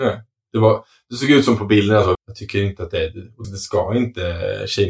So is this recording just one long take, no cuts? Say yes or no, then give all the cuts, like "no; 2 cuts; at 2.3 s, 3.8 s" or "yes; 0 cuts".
no; 2 cuts; at 2.1 s, 3.4 s